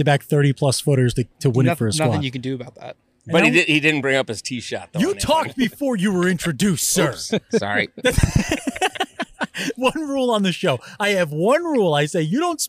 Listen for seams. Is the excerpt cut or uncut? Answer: uncut